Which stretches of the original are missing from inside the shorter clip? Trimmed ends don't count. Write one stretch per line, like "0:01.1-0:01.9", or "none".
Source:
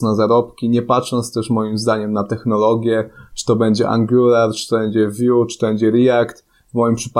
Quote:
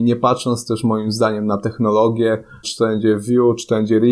0:03.3-0:04.5